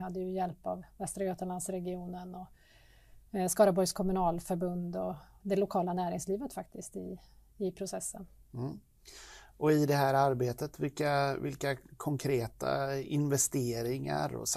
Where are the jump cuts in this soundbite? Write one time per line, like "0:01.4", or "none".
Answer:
0:05.4